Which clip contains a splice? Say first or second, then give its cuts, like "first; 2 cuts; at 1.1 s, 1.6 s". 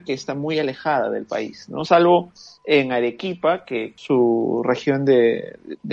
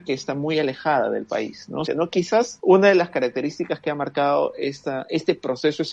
second; 1 cut; at 1.9 s